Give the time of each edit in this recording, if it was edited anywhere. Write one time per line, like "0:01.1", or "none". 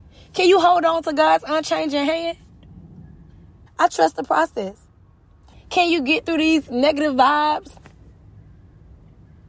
0:03.7
0:05.5

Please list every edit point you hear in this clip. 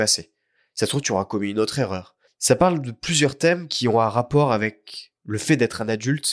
0:02.3

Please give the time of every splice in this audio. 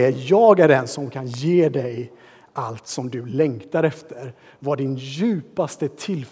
none

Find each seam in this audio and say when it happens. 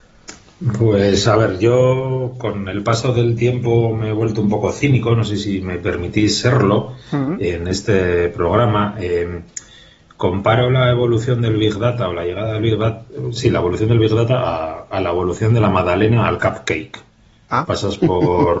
none

